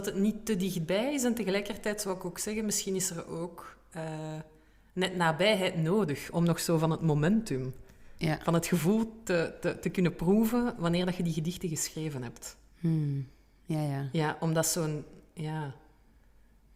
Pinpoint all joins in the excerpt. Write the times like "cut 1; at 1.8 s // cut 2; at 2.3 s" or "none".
none

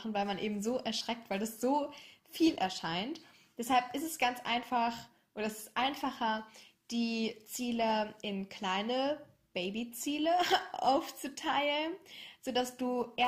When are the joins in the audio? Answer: none

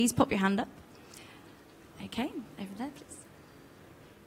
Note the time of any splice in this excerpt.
none

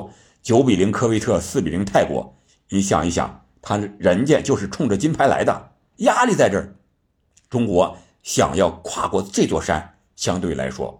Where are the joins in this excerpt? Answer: cut 1; at 5.9 s

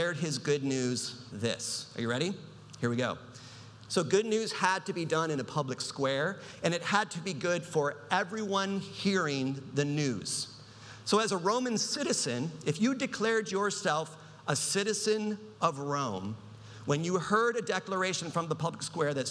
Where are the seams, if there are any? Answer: cut 1; at 1.3 s // cut 2; at 3.9 s

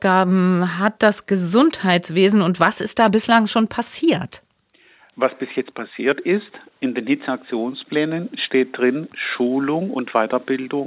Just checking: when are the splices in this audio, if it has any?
none

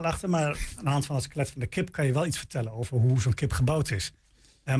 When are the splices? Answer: none

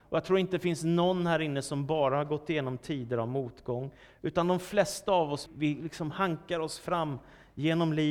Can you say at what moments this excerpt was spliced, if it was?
cut 1; at 5.5 s

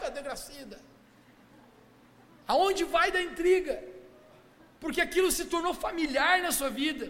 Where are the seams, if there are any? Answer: none

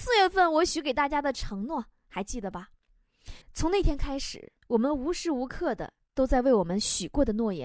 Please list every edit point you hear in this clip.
cut 1; at 3.4 s // cut 2; at 4.6 s

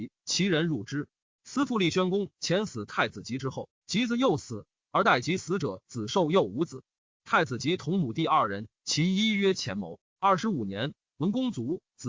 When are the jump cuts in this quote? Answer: cut 1; at 1.3 s // cut 2; at 10.0 s

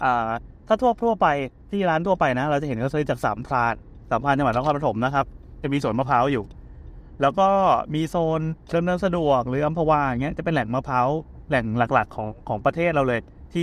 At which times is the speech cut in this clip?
none

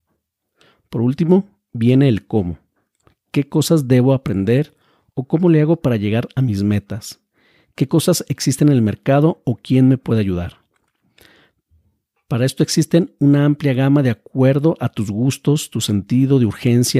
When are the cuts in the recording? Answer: none

